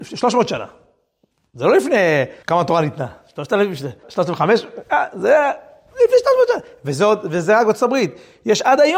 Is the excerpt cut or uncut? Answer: cut